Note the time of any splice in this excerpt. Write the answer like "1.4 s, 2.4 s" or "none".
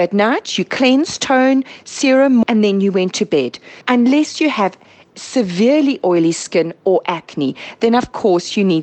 2.4 s, 3.8 s